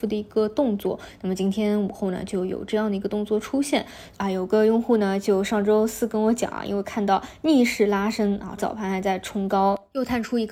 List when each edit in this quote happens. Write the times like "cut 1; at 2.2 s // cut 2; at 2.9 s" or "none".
cut 1; at 4.1 s // cut 2; at 8.6 s